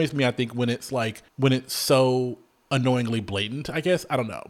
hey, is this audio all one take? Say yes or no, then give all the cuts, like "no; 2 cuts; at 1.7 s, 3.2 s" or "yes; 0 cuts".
no; 1 cut; at 1.3 s